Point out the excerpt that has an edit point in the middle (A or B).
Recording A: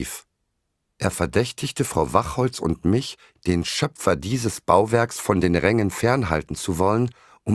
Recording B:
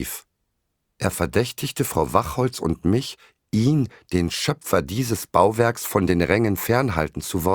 A